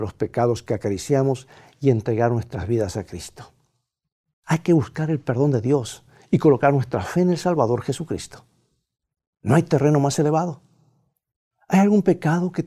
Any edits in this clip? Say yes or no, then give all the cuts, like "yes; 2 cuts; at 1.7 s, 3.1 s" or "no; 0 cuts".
no; 0 cuts